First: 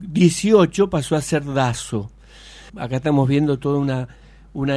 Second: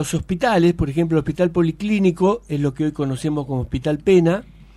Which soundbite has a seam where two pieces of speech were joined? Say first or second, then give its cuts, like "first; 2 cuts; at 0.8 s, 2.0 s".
first; 1 cut; at 2.7 s